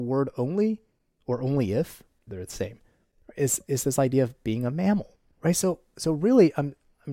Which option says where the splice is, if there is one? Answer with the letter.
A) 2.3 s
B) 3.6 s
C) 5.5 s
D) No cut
A